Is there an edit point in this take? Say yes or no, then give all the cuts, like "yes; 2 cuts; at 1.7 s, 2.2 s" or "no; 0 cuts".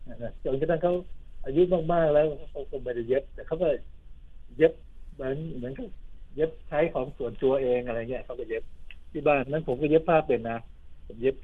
yes; 1 cut; at 9.4 s